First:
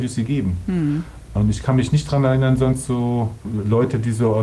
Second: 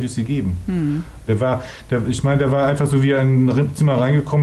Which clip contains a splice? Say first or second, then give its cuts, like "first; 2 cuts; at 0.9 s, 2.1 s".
second; 1 cut; at 1.3 s